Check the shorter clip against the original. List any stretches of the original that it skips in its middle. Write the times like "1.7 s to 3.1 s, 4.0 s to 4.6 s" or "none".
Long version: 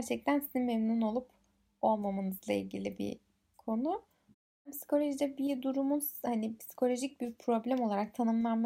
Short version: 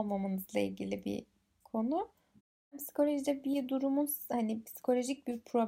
none

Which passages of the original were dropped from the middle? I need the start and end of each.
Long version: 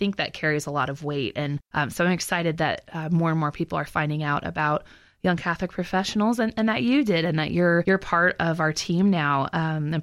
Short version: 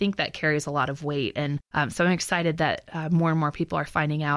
none

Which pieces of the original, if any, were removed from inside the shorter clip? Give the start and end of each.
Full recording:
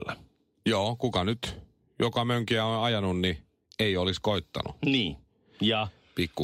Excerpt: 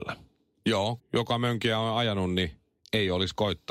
1.0 s to 1.8 s

